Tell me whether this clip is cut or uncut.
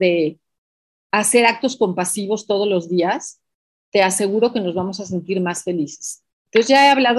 uncut